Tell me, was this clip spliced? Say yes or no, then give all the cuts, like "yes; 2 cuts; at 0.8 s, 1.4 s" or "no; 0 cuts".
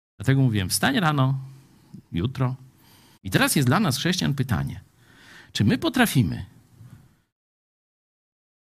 yes; 1 cut; at 3.2 s